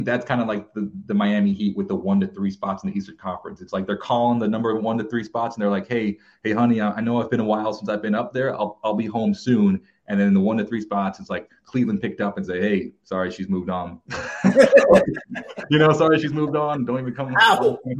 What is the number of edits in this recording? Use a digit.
0